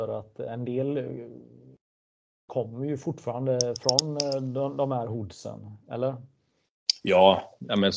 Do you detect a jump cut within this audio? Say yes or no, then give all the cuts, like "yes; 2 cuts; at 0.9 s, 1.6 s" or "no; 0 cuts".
no; 0 cuts